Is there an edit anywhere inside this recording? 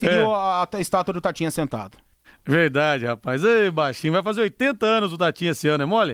no; 0 cuts

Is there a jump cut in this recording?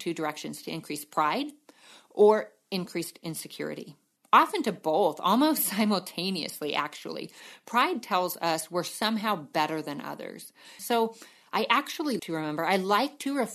yes; 2 cuts; at 10.8 s, 12.2 s

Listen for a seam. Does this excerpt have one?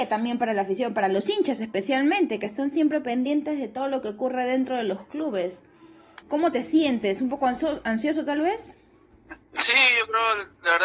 yes; 2 cuts; at 6.2 s, 9.4 s

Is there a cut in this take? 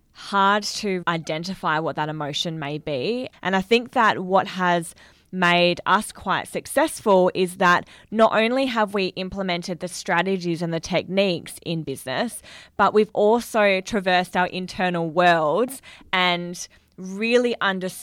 yes; 2 cuts; at 1.0 s, 3.3 s

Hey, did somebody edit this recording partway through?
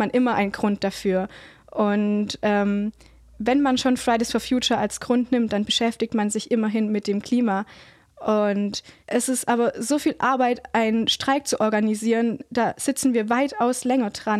no; 0 cuts

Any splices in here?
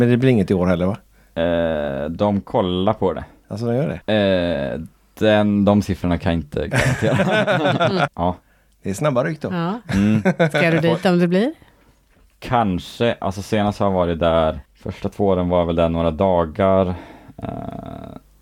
yes; 3 cuts; at 4.0 s, 8.1 s, 14.7 s

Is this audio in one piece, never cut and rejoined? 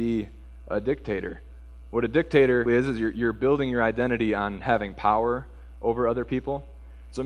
no; 1 cut; at 2.7 s

